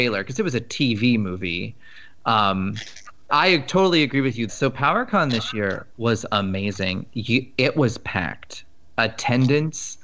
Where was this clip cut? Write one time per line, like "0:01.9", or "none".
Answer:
0:03.3
0:04.5

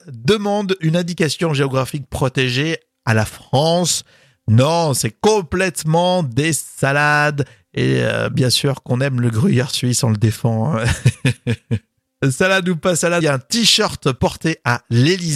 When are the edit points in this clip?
0:13.2

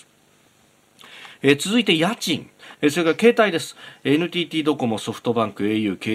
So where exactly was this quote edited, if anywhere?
0:02.7

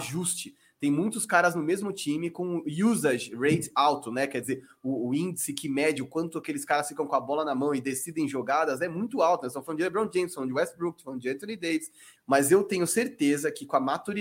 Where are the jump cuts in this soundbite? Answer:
0:12.2

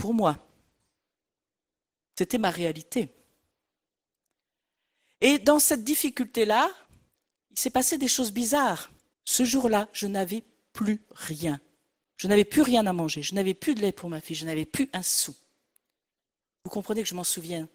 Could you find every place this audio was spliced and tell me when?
0:09.1

